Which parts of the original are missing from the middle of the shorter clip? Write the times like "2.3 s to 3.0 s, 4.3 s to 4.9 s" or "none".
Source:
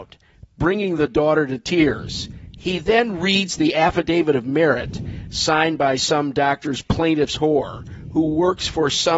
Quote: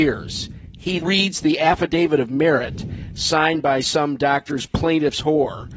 2.8 s to 3.2 s